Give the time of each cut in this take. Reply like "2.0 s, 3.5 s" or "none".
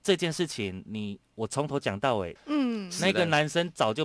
2.4 s